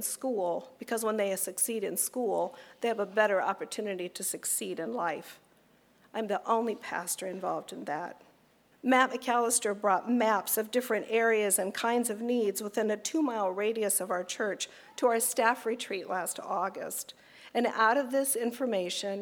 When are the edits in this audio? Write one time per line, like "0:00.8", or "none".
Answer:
0:08.7